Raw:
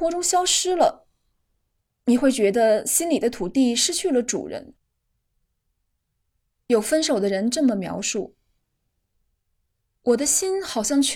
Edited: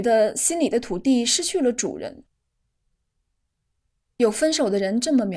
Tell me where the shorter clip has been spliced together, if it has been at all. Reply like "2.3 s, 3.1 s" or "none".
none